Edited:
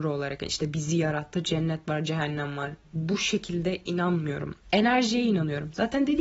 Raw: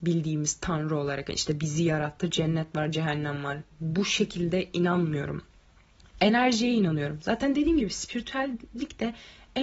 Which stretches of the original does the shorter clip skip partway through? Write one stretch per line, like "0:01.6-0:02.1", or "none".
0:05.5-0:06.1